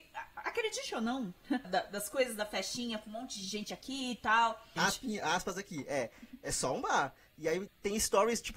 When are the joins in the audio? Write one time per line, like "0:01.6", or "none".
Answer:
0:01.6
0:04.8
0:07.7